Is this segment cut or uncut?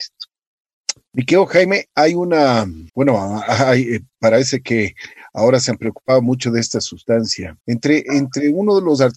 cut